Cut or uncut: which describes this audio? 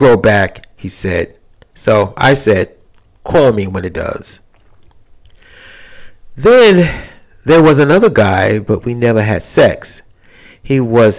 uncut